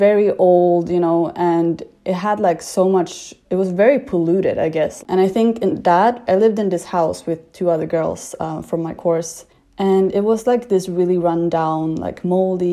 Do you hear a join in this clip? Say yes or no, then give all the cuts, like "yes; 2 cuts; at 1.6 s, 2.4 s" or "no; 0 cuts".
yes; 2 cuts; at 5.0 s, 6.3 s